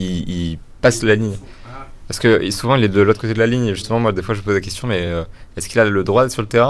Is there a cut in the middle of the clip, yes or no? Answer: no